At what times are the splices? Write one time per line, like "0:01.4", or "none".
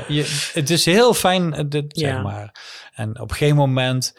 0:02.0

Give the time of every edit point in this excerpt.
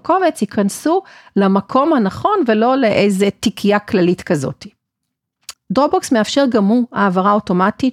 0:05.5

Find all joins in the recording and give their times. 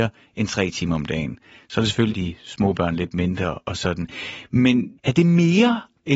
0:02.1

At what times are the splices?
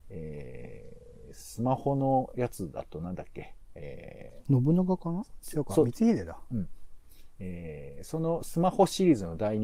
none

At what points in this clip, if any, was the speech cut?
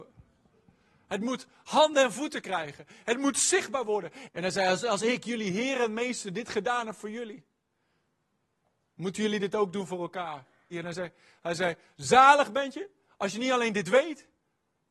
0:04.3
0:10.7

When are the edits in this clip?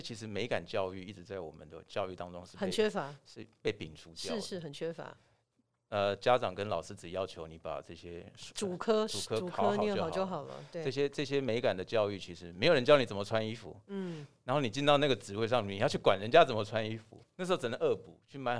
0:17.2

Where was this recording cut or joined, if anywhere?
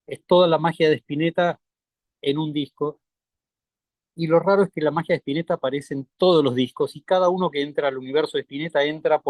none

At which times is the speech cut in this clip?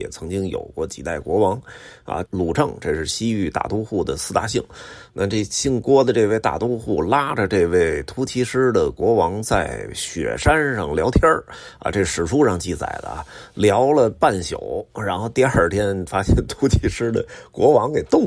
0:02.2

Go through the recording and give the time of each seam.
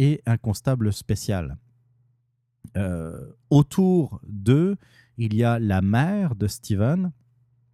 none

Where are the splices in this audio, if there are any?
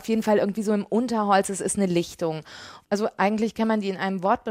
0:02.8

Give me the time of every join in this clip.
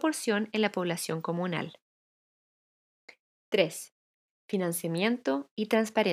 none

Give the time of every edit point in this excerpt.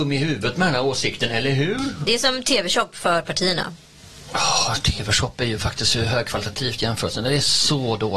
none

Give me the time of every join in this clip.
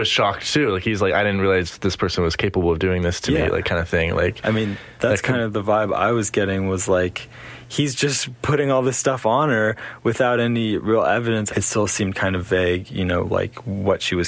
0:11.5

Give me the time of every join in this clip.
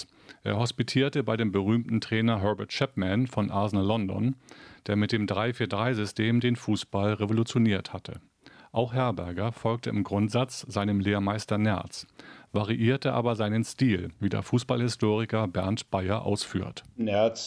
none

